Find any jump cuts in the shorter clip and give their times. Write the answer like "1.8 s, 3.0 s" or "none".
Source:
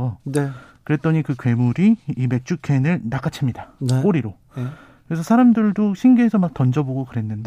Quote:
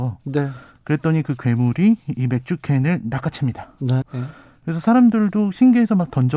4.0 s